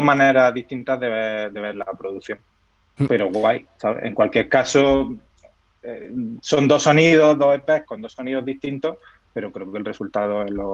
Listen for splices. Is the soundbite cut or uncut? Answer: uncut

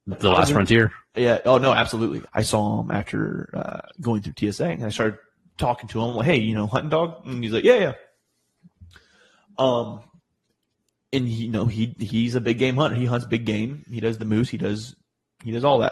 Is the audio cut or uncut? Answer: cut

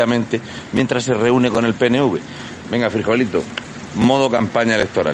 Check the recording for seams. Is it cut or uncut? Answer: cut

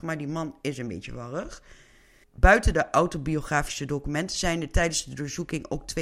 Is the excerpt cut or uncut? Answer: cut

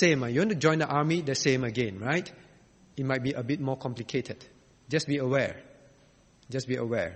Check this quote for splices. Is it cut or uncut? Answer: uncut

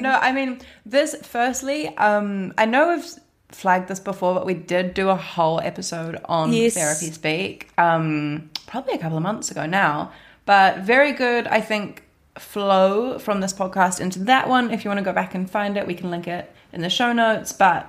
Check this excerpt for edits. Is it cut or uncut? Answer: uncut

